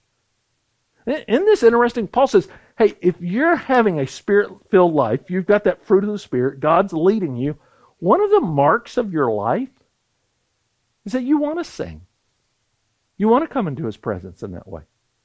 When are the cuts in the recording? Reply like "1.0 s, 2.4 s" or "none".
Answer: 13.0 s